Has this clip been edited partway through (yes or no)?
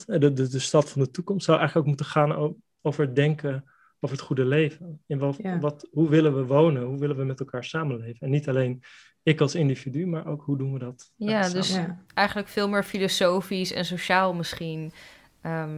no